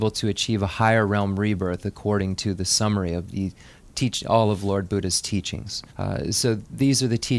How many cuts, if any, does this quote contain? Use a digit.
1